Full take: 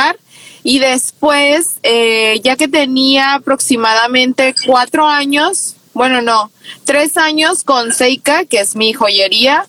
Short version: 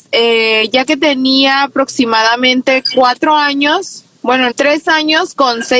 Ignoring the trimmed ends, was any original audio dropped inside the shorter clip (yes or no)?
yes